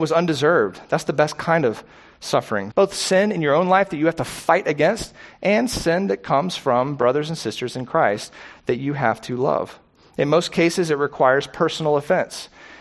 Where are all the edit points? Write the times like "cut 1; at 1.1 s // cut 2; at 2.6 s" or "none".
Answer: cut 1; at 2.7 s

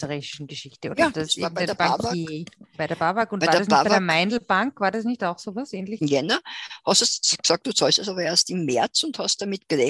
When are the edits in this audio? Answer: cut 1; at 6.0 s

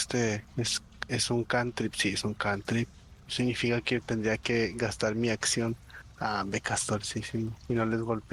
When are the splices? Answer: none

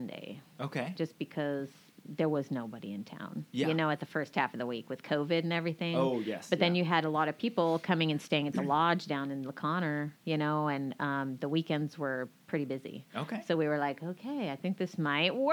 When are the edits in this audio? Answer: none

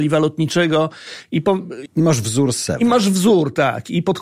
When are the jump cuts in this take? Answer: cut 1; at 1.9 s

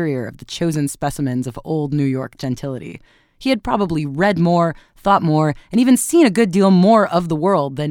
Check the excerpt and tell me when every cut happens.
none

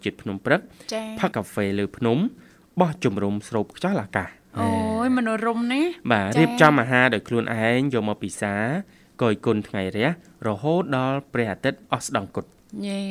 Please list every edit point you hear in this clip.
cut 1; at 1.3 s

